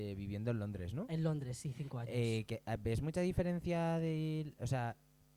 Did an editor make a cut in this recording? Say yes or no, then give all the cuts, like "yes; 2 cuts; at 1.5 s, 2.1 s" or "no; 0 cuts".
no; 0 cuts